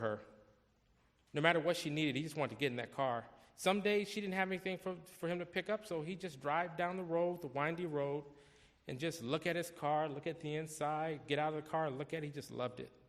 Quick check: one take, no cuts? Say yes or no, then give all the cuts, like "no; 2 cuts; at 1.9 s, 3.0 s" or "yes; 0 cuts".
yes; 0 cuts